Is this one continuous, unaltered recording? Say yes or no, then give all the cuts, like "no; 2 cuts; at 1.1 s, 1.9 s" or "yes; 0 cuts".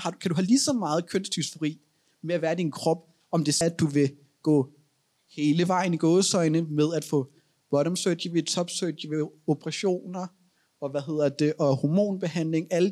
no; 1 cut; at 3.6 s